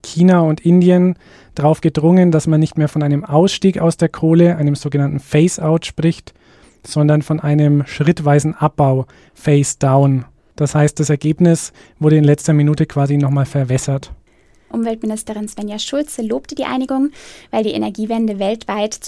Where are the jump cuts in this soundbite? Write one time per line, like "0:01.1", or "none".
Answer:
0:14.7